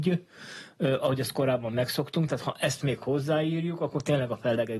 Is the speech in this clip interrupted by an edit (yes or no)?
no